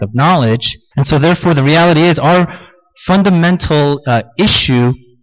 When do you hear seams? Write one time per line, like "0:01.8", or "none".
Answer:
0:00.9